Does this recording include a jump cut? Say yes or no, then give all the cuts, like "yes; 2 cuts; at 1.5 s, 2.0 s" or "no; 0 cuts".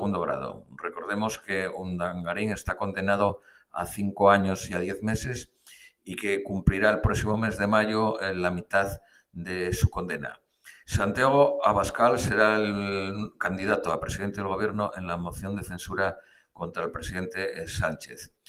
yes; 1 cut; at 10.8 s